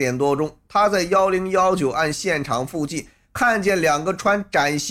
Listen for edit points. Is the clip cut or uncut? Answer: uncut